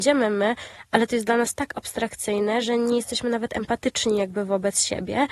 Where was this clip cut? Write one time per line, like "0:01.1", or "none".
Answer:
none